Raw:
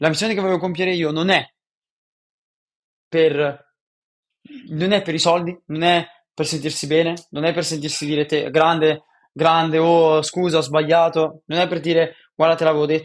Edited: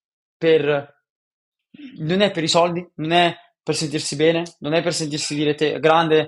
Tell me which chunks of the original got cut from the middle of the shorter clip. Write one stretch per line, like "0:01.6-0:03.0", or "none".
none